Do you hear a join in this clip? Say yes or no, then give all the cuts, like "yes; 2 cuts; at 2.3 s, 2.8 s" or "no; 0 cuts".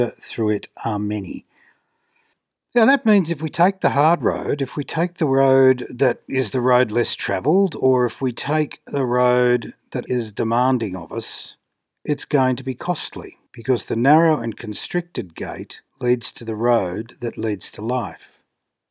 yes; 3 cuts; at 10.1 s, 13.5 s, 15.9 s